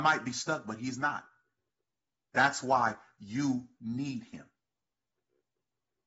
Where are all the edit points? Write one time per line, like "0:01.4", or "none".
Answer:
0:02.3